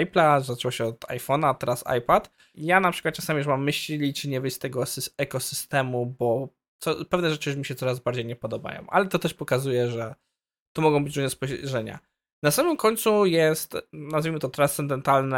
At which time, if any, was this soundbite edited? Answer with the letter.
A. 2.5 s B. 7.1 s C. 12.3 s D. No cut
A